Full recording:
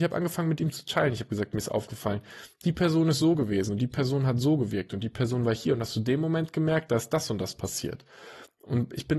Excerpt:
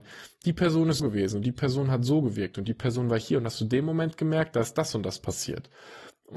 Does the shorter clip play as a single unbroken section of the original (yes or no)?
no